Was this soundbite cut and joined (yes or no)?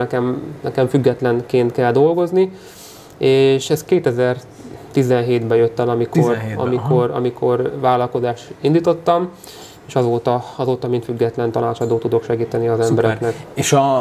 no